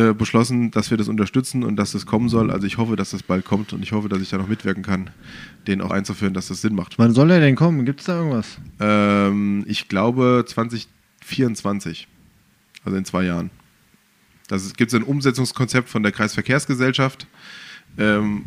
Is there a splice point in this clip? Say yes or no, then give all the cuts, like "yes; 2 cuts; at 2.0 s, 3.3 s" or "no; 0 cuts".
yes; 1 cut; at 5.9 s